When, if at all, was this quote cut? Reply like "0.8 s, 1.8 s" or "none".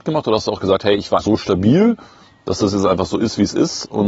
1.2 s